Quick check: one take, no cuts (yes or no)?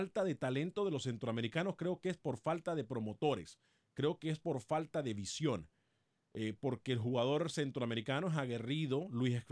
yes